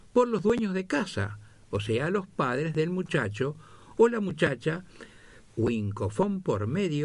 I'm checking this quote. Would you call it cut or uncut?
cut